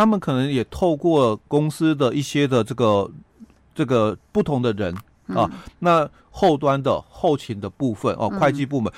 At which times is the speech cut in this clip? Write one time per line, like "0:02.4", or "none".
0:06.2